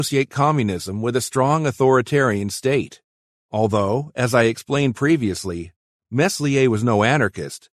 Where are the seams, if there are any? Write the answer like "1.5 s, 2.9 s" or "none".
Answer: none